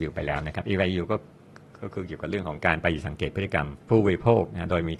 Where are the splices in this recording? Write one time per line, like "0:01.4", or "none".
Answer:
0:03.8